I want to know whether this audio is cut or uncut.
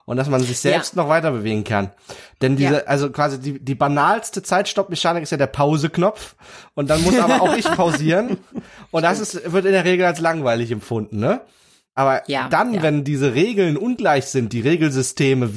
uncut